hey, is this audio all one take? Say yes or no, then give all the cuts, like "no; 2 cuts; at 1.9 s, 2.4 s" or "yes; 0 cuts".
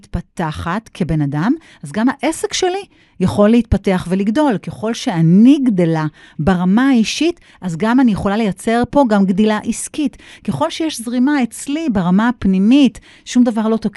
yes; 0 cuts